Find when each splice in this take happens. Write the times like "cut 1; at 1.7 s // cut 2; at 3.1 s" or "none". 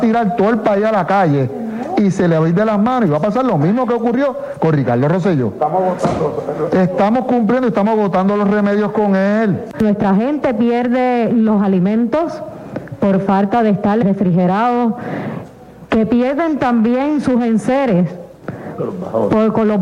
cut 1; at 9.7 s // cut 2; at 14.0 s